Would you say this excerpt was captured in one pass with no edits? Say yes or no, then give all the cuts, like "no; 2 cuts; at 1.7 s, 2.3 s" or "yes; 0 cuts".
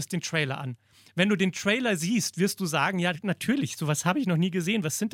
yes; 0 cuts